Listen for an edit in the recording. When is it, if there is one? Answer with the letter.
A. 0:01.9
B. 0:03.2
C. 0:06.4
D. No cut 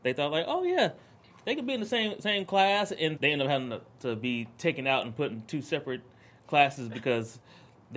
B